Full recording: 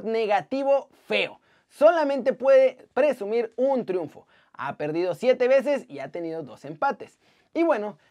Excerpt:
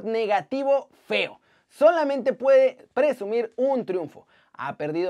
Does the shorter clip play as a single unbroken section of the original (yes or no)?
yes